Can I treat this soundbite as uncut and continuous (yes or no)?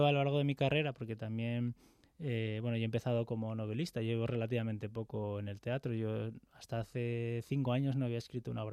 yes